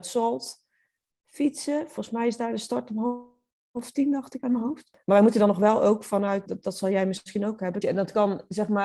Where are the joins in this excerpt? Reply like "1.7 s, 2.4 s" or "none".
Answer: 6.5 s, 7.8 s